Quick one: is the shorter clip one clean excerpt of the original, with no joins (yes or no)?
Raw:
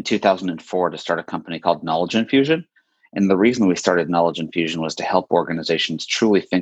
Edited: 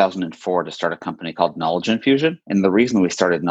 no